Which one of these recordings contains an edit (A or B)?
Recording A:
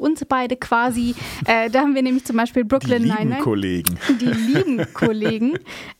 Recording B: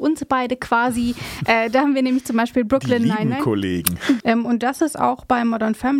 B